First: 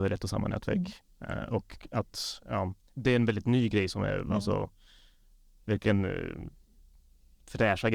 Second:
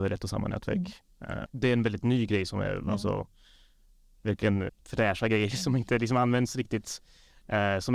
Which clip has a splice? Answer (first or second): second